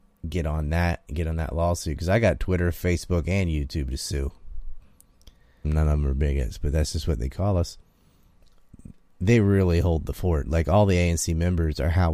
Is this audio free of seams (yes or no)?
no